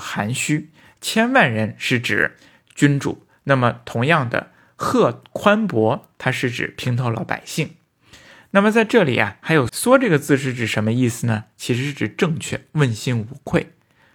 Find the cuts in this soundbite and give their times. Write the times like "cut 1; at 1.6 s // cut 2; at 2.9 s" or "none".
cut 1; at 9.7 s